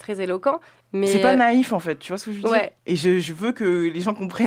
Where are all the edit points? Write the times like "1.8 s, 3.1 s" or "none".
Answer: none